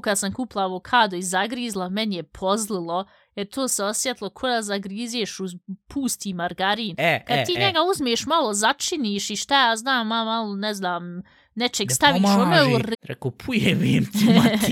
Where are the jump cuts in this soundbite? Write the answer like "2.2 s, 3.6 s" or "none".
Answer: 12.9 s